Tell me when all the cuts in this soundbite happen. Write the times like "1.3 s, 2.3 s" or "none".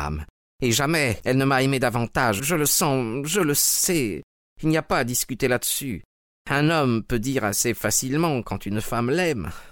2.4 s